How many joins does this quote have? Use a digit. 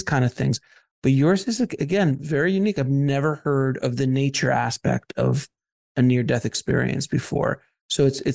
0